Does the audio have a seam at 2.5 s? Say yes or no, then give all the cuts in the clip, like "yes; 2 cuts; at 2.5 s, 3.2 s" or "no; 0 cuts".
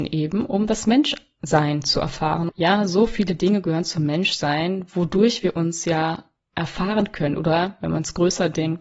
yes; 1 cut; at 2.5 s